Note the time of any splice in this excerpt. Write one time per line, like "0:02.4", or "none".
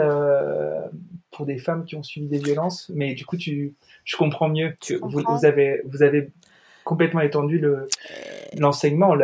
none